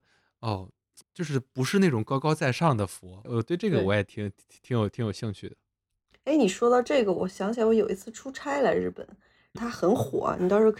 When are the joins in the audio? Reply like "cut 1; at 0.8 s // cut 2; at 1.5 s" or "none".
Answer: cut 1; at 1.0 s // cut 2; at 3.2 s // cut 3; at 9.6 s